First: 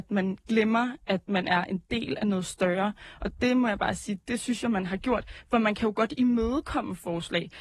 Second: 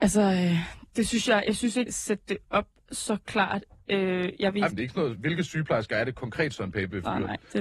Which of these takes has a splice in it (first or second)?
second